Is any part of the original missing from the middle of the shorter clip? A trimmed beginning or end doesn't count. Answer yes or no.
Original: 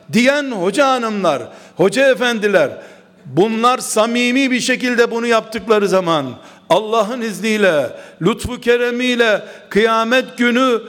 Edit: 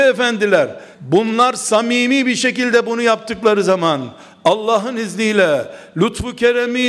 yes